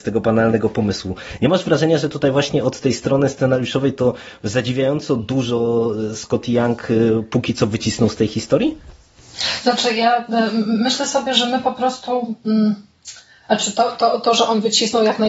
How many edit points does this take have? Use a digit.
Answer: 0